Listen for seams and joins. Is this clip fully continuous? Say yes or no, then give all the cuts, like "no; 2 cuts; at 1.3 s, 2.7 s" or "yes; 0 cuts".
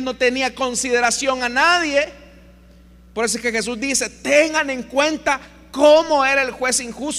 yes; 0 cuts